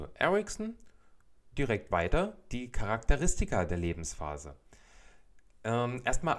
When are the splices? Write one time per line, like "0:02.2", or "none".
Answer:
none

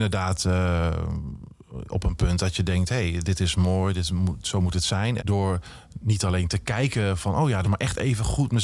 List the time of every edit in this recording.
0:05.2
0:07.6

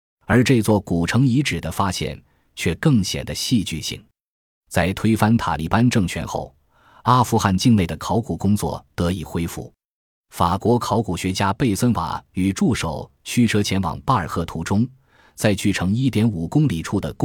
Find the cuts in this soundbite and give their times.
none

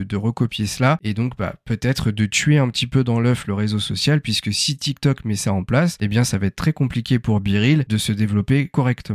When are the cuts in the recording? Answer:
none

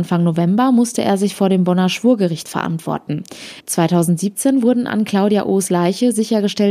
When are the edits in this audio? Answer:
0:03.6

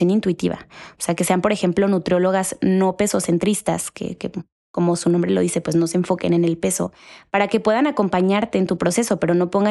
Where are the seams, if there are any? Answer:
none

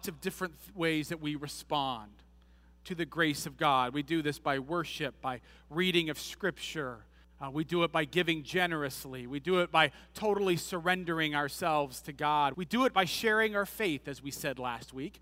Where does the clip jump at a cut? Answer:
0:12.5

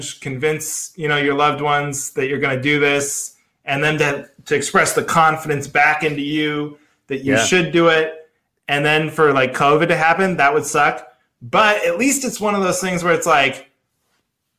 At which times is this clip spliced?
none

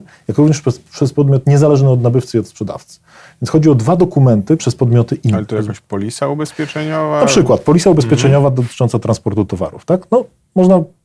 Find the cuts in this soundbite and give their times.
0:04.6

